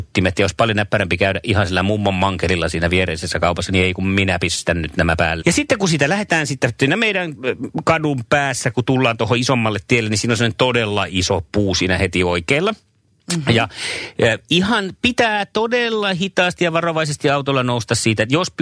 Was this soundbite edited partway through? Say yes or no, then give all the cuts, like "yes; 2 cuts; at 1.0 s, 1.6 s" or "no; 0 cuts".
yes; 1 cut; at 5.4 s